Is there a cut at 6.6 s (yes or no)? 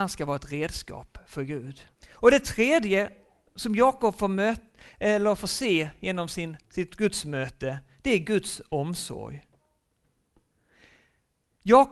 yes